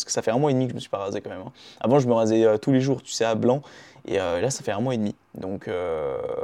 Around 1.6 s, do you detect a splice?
no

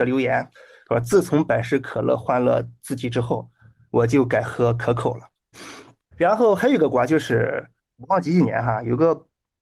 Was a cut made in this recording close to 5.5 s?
yes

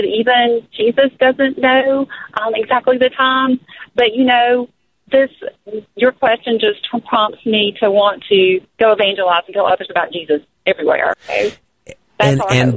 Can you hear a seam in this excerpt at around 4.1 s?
no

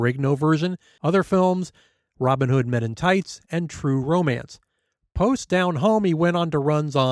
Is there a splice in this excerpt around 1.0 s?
yes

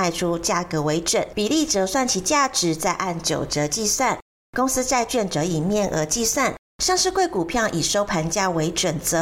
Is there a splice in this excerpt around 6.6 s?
no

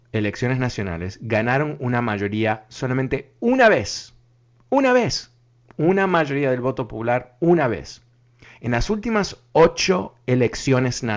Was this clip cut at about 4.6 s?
no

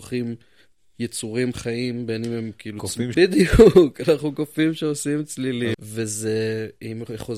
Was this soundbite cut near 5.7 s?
yes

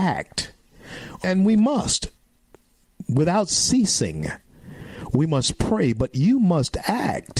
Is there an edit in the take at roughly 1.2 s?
yes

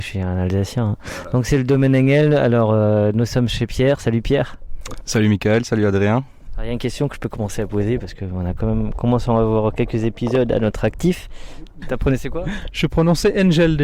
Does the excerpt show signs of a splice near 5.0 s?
no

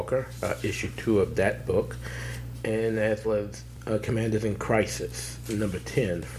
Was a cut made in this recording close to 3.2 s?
yes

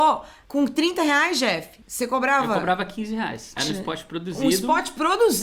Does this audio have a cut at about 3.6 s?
yes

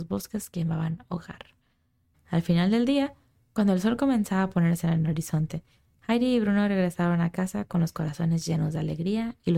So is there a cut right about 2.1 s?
yes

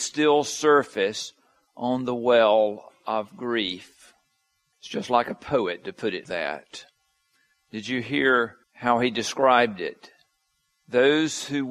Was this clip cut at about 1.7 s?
no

